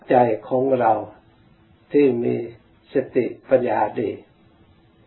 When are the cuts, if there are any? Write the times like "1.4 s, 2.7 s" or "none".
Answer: 3.6 s